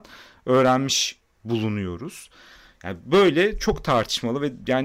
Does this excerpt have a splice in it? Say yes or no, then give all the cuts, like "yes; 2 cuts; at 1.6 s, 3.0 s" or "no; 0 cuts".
no; 0 cuts